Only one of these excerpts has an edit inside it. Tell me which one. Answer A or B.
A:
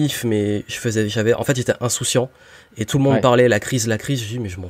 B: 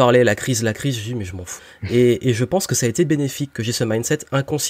B